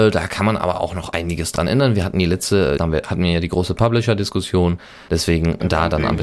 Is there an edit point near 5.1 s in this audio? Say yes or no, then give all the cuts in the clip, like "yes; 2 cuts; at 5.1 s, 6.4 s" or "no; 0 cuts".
no; 1 cut; at 2.8 s